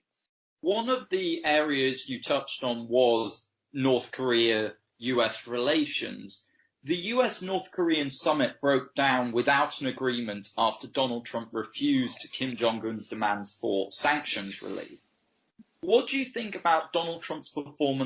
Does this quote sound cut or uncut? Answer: uncut